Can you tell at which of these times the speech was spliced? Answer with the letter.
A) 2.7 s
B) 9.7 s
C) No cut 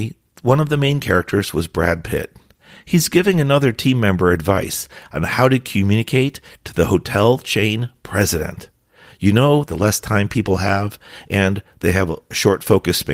B